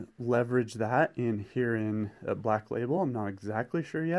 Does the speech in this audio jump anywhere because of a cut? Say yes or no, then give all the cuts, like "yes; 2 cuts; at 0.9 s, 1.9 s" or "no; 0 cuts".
no; 0 cuts